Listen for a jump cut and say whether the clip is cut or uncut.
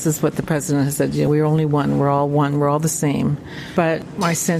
uncut